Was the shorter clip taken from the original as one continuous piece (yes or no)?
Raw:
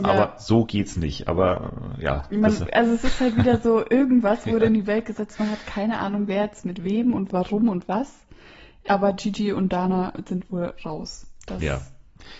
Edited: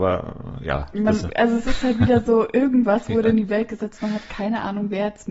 yes